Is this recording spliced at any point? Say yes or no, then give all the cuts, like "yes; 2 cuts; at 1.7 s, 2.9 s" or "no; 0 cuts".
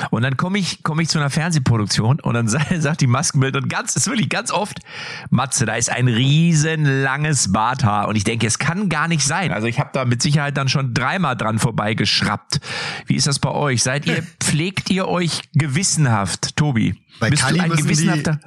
yes; 1 cut; at 9.5 s